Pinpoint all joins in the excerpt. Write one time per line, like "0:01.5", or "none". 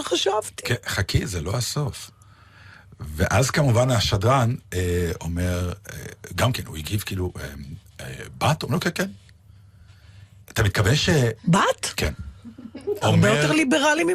0:11.4
0:13.0